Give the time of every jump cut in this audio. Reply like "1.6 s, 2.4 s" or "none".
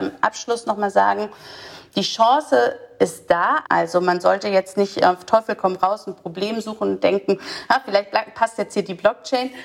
3.6 s